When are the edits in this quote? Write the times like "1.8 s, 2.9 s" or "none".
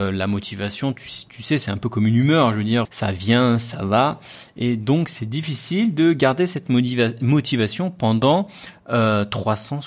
2.9 s

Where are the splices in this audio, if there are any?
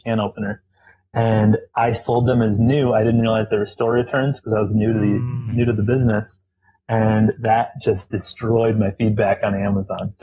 none

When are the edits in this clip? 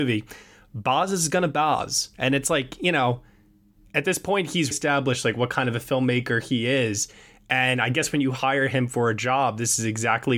2.1 s, 4.7 s

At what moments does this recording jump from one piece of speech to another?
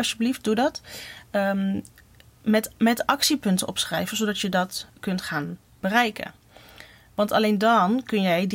none

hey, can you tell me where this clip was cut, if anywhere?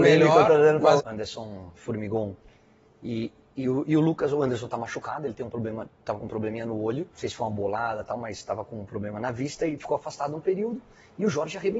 1.0 s, 5.9 s, 7.1 s

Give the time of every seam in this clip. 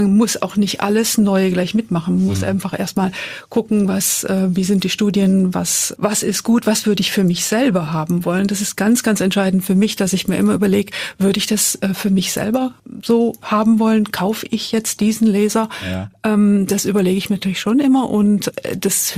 none

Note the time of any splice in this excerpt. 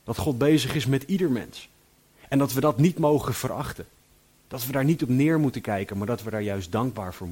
none

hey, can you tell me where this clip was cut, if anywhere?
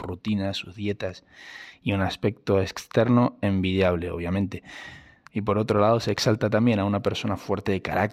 5.3 s

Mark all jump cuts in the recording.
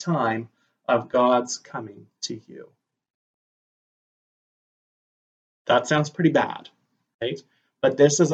none

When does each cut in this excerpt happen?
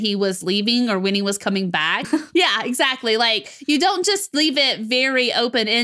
2.0 s

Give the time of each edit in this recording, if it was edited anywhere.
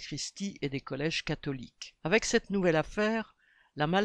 2.0 s

